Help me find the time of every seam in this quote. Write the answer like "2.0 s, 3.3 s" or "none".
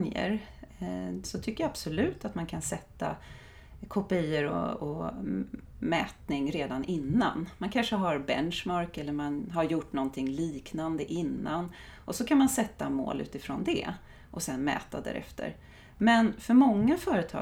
1.2 s

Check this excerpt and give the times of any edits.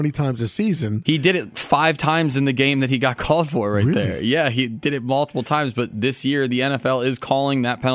none

